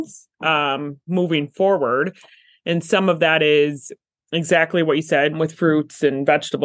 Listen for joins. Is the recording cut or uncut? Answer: cut